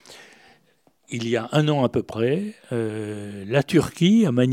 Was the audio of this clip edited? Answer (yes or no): no